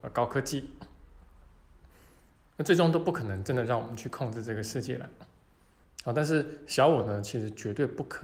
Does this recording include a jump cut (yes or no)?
yes